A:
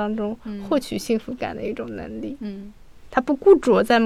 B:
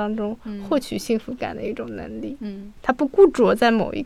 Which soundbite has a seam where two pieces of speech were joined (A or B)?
B